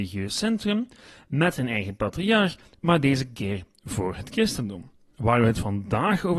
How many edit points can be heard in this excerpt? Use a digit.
1